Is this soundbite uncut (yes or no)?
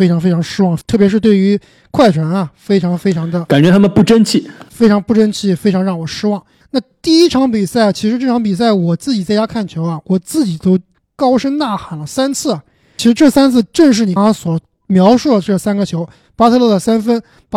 no